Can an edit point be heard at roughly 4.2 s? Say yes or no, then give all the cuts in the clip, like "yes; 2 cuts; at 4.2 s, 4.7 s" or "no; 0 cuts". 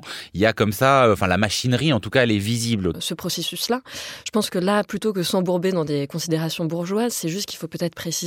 no; 1 cut; at 2.9 s